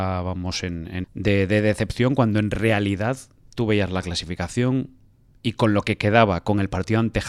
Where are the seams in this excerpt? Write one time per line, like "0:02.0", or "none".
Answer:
0:01.0